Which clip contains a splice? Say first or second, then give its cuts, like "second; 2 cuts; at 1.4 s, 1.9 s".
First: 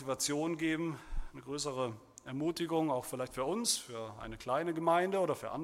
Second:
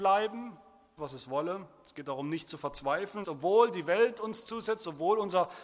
second; 2 cuts; at 1.0 s, 3.2 s